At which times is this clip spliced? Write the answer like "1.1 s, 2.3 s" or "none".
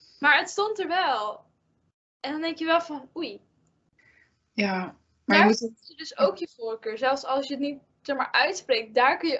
none